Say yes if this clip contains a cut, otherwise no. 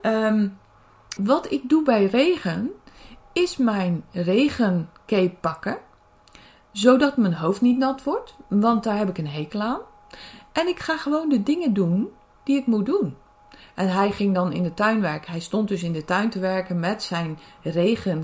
yes